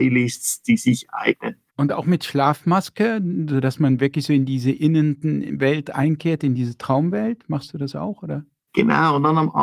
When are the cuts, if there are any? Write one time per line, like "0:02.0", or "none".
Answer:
0:01.7